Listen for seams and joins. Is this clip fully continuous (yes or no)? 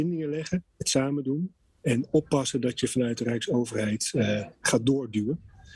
no